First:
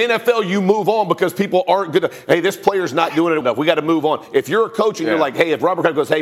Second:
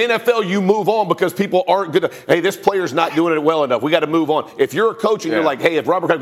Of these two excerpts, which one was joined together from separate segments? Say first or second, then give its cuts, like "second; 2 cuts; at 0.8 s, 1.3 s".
first; 1 cut; at 3.4 s